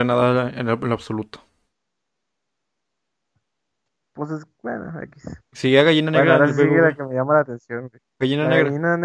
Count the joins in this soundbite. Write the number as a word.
zero